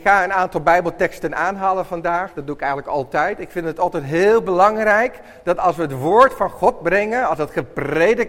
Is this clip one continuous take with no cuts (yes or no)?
yes